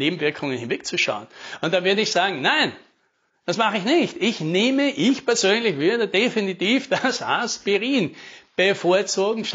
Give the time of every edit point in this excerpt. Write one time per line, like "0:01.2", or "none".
none